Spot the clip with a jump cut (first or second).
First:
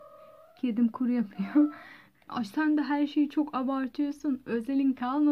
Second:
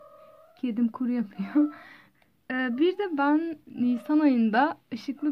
first